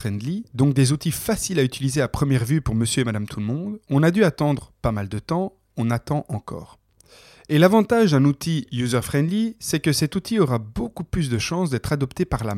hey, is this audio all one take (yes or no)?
no